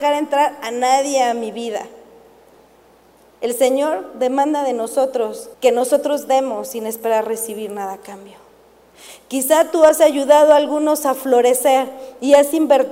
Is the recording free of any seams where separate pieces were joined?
no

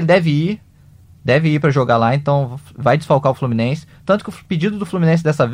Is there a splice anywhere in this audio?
no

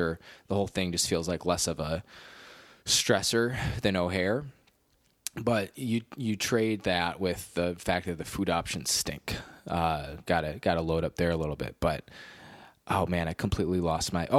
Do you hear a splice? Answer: yes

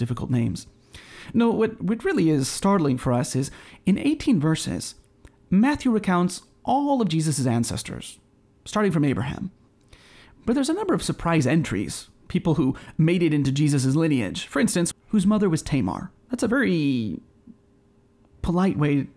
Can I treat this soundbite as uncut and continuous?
no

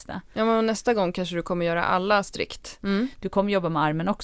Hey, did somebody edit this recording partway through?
yes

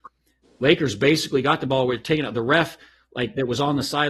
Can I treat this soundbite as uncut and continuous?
yes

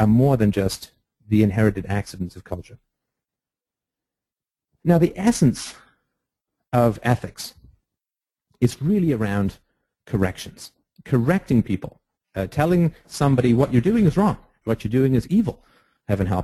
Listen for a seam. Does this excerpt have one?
yes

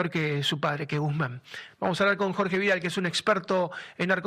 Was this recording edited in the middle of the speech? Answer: no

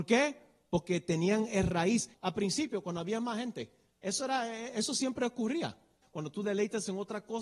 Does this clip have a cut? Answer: yes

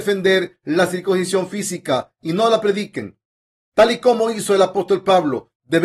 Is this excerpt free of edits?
yes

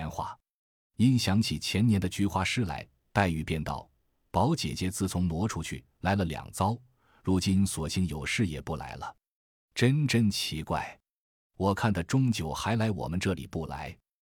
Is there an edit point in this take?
no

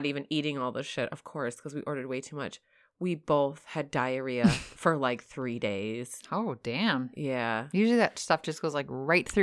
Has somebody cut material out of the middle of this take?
no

